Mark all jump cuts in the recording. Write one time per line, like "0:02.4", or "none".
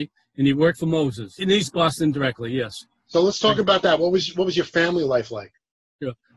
0:01.4